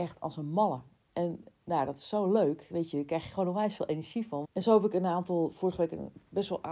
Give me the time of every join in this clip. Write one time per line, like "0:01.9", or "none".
0:04.4